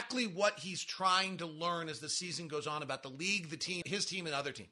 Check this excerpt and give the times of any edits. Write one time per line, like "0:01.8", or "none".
0:03.8